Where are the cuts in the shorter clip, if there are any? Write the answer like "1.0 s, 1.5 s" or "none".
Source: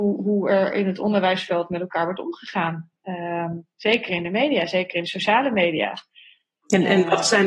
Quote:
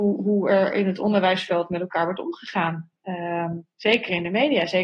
none